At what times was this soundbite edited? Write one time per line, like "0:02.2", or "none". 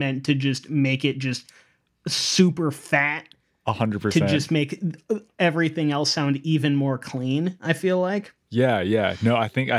none